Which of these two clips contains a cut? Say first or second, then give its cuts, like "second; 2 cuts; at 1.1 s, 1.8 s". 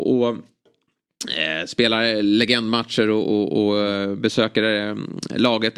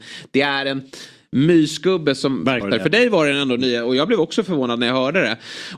second; 1 cut; at 2.6 s